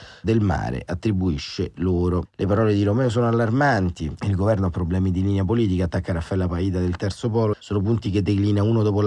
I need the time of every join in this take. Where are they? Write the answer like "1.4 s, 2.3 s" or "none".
2.2 s, 7.5 s